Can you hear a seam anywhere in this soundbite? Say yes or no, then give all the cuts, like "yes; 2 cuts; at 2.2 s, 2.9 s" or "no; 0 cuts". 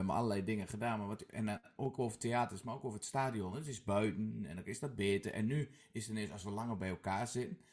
no; 0 cuts